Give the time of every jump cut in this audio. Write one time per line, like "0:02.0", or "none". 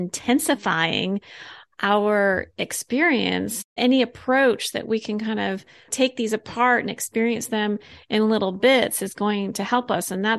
0:03.7